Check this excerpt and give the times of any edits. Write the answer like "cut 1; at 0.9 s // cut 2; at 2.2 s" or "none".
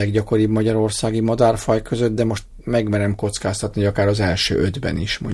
none